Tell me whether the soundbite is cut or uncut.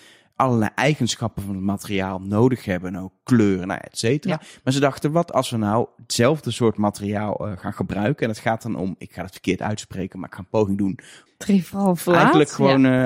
cut